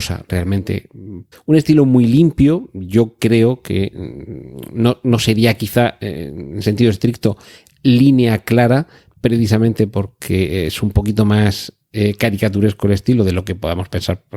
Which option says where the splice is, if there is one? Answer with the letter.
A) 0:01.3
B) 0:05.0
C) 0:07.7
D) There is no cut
A